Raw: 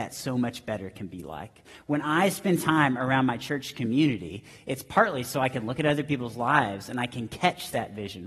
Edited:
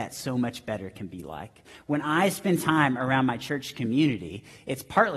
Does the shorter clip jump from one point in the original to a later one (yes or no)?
no